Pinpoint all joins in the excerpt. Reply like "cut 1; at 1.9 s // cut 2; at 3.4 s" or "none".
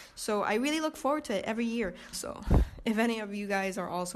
cut 1; at 2.1 s